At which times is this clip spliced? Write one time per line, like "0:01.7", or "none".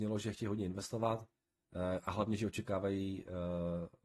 none